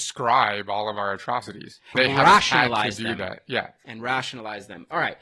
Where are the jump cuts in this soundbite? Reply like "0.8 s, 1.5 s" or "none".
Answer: 1.9 s